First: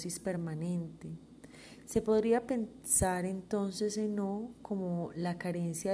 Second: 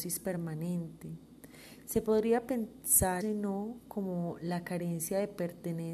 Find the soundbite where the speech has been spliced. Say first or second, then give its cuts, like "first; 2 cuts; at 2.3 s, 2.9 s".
second; 1 cut; at 3.2 s